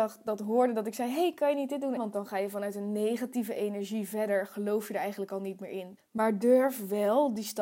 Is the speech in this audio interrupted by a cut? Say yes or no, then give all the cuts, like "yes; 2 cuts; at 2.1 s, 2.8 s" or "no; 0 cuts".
yes; 2 cuts; at 2.0 s, 6.0 s